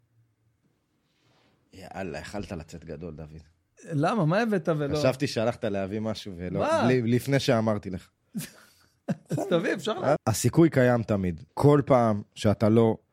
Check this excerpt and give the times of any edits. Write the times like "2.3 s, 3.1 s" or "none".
10.2 s, 11.5 s